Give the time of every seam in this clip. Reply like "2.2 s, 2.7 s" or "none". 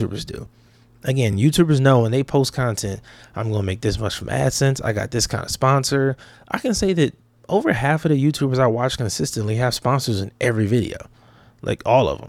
none